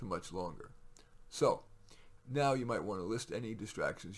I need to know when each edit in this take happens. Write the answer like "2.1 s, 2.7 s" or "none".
none